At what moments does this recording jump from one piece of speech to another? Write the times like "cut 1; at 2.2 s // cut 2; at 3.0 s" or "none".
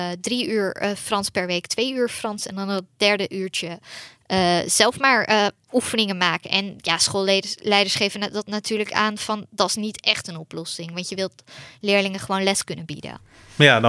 none